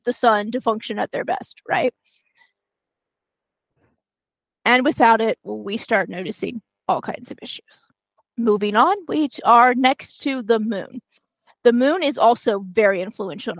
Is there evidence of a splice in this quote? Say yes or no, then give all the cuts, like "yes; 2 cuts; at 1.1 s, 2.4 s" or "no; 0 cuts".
no; 0 cuts